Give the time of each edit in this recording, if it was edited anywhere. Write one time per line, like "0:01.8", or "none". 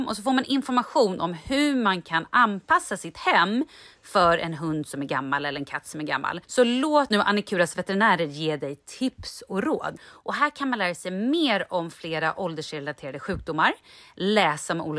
0:06.4
0:10.0